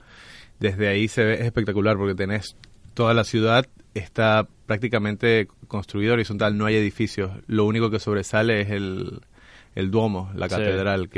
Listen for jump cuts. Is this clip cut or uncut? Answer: uncut